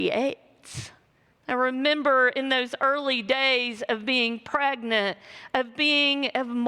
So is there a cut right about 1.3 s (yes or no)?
yes